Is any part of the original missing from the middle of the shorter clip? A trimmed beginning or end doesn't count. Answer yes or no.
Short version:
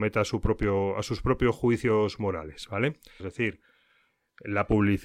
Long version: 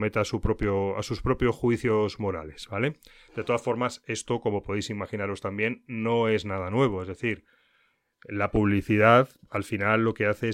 yes